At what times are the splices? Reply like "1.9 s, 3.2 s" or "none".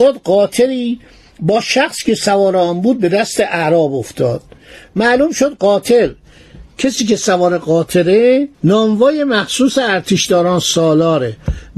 8.5 s